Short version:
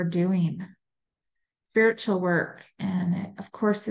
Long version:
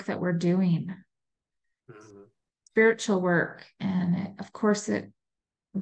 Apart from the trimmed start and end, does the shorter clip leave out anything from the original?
yes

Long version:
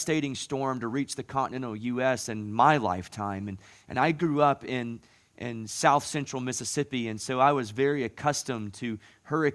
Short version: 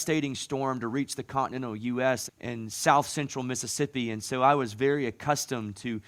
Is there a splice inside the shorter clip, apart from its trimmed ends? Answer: yes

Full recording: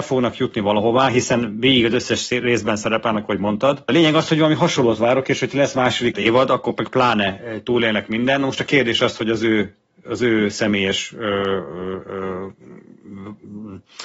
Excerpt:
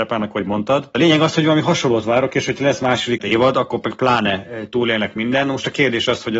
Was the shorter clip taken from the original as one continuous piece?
yes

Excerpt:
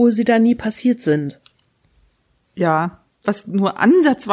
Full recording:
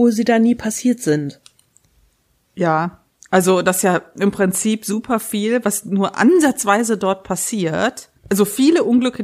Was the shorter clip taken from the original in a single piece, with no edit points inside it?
no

